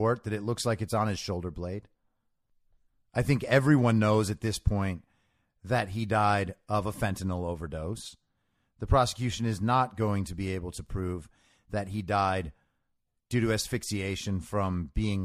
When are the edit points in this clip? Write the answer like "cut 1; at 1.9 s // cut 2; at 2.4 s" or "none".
none

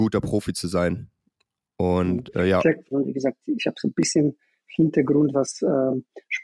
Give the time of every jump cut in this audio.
cut 1; at 2.9 s // cut 2; at 5.3 s

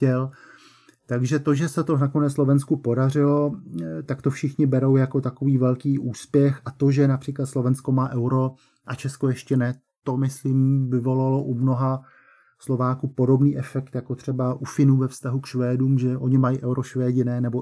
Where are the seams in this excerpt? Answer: none

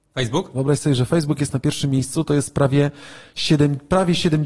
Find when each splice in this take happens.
none

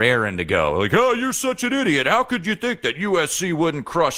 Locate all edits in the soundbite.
none

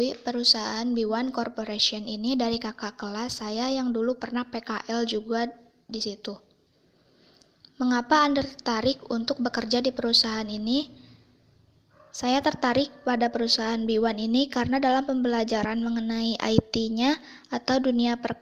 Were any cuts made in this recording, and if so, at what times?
none

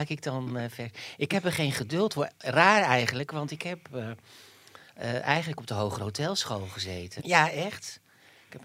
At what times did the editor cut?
cut 1; at 7.2 s

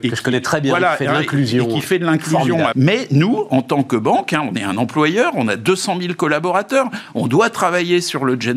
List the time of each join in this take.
cut 1; at 2.7 s

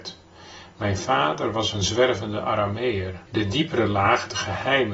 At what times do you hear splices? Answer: cut 1; at 3.3 s

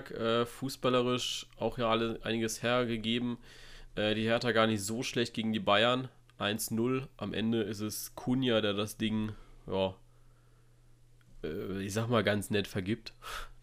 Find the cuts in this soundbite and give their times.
none

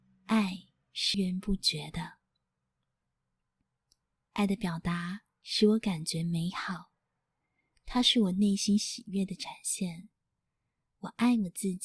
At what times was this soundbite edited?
cut 1; at 1.1 s

